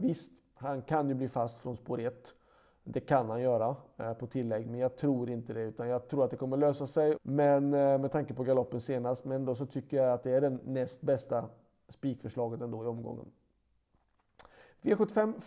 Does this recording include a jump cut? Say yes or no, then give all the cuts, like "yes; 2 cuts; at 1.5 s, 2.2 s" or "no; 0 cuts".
yes; 1 cut; at 7.2 s